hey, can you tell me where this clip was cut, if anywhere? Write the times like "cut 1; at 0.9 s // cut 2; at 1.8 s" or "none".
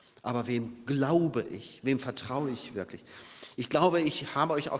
cut 1; at 1.8 s